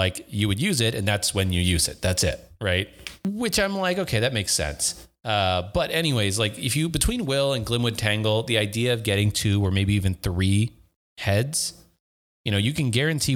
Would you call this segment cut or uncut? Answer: uncut